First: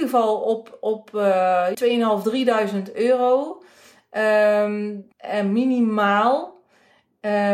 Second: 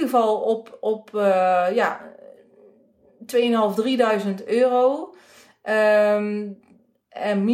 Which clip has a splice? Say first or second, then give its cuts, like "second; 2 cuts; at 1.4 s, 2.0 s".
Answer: first; 2 cuts; at 1.7 s, 5.1 s